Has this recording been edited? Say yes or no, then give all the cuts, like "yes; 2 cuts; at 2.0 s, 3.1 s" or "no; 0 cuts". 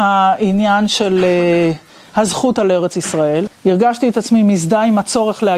yes; 1 cut; at 3.5 s